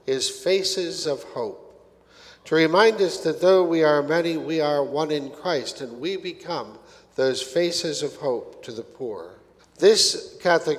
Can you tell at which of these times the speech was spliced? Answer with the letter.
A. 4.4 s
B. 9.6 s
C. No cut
B